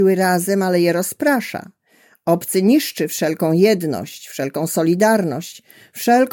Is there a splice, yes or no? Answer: no